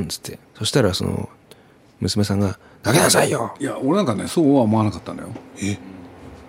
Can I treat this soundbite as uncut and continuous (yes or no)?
no